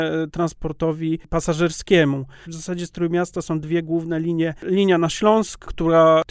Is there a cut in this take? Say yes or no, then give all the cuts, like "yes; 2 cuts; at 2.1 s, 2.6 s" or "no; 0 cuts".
yes; 1 cut; at 2.4 s